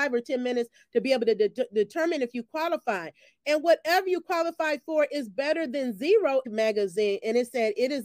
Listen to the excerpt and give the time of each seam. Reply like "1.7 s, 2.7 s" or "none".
6.4 s